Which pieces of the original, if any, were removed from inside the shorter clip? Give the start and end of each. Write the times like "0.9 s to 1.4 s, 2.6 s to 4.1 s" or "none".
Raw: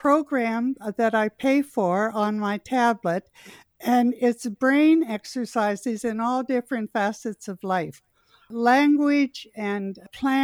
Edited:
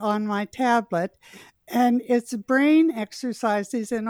none